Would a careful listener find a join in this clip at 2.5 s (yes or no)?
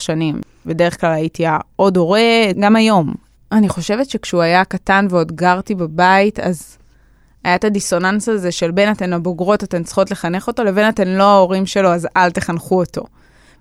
yes